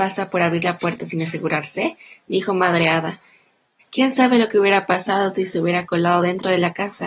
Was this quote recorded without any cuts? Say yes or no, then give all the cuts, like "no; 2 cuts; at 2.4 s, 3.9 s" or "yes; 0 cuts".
no; 1 cut; at 3.8 s